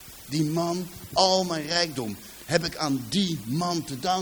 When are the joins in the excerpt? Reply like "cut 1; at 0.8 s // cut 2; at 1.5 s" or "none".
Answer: cut 1; at 1.1 s